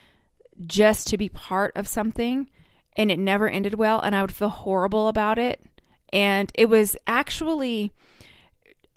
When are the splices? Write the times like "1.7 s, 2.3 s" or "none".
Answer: none

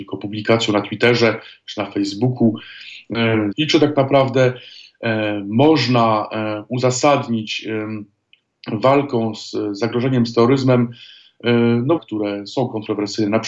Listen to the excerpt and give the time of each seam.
3.5 s, 12.0 s

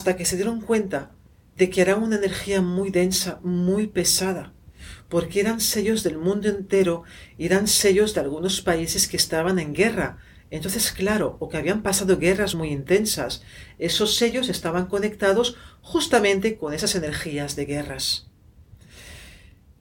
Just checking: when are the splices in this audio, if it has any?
none

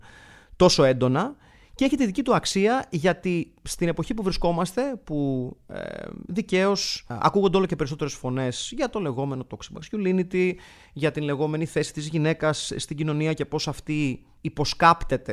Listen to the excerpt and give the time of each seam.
none

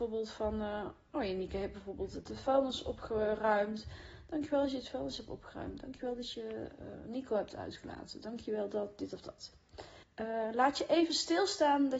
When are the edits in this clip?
10.0 s

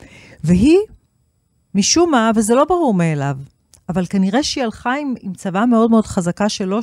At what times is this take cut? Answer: none

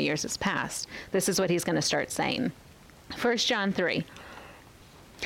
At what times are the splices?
none

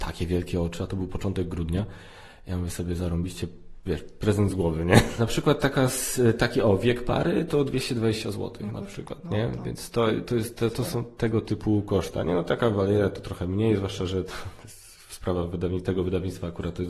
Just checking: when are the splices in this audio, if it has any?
5.2 s

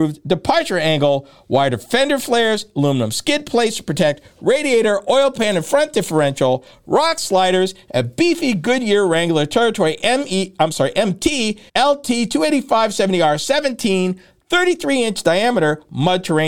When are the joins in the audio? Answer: 11.7 s

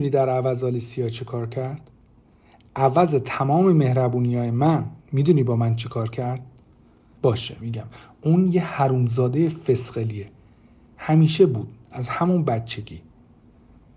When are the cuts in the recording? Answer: 7.2 s

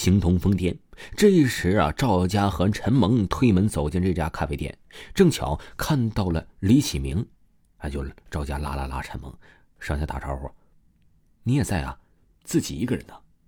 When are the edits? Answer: 12.3 s

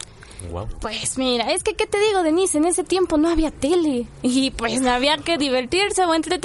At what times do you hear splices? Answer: none

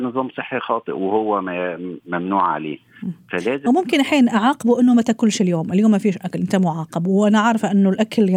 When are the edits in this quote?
none

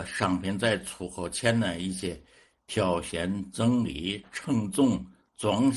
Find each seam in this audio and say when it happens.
none

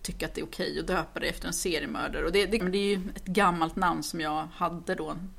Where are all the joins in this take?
2.6 s

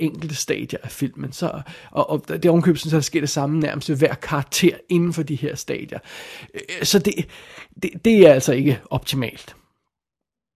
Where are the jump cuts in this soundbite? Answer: none

